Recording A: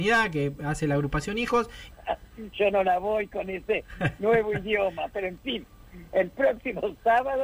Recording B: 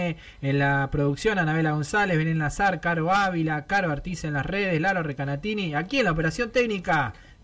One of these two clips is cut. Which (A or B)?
A